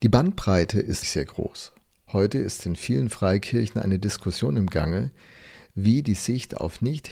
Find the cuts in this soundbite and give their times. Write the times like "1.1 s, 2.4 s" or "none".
1.0 s